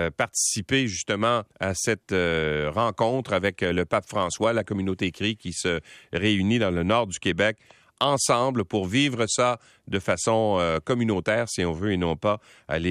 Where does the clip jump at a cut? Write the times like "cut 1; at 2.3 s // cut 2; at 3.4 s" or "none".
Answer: cut 1; at 1.5 s